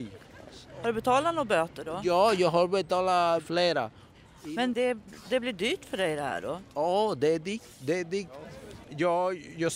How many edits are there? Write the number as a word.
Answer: two